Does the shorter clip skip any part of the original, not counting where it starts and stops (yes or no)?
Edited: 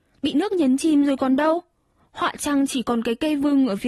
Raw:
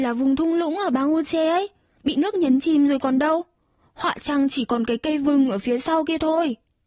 no